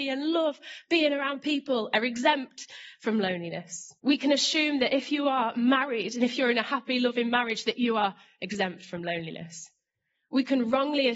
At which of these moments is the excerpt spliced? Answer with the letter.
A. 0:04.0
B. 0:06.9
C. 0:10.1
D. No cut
A